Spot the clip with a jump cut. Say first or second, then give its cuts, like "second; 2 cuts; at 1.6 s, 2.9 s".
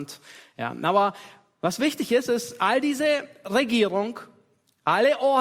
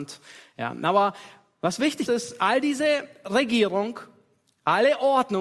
second; 1 cut; at 2.1 s